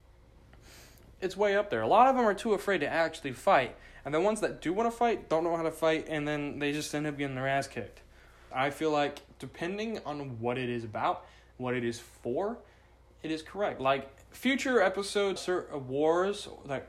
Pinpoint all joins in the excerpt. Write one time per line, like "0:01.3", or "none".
0:08.5
0:15.4